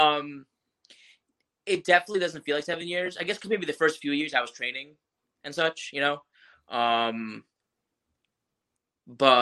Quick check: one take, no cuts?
yes; 0 cuts

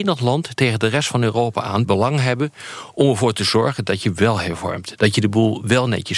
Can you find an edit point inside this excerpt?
yes; 1 cut; at 1.8 s

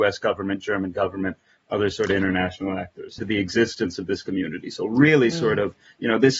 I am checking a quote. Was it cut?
yes; 1 cut; at 3.2 s

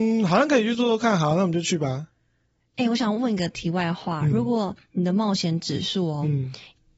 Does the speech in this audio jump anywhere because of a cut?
no; 0 cuts

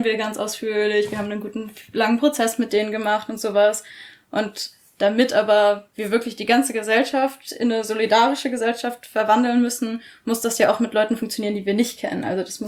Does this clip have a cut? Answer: no; 0 cuts

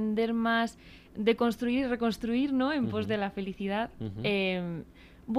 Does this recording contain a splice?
no; 0 cuts

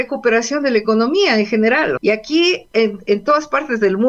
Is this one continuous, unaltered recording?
no; 1 cut; at 2.0 s

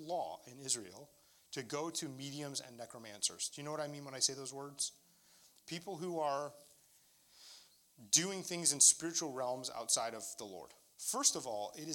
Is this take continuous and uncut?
no; 1 cut; at 10.9 s

